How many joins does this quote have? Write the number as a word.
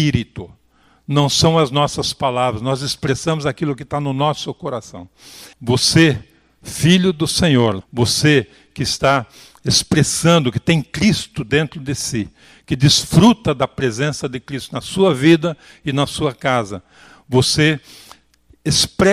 two